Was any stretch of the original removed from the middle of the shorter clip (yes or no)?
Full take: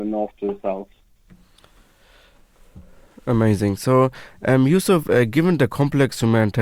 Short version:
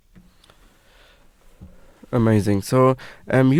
no